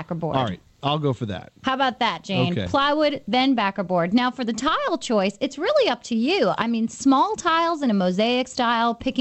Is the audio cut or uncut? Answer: uncut